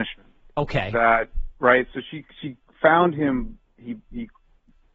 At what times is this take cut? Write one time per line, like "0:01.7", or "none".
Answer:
none